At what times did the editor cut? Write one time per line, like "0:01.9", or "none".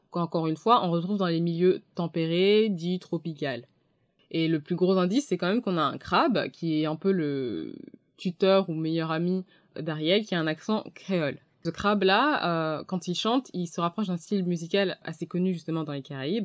none